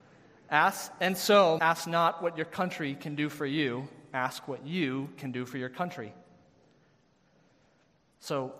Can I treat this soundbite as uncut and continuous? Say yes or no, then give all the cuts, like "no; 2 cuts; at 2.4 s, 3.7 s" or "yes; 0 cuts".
no; 1 cut; at 1.6 s